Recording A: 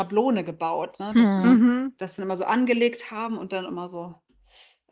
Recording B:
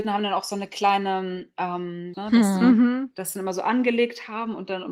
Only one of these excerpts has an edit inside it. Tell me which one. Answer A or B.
B